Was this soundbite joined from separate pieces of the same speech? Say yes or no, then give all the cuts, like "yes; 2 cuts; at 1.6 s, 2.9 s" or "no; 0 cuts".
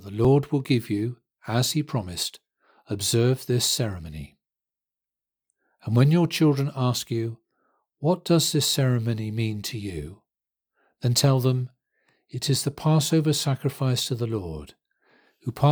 no; 0 cuts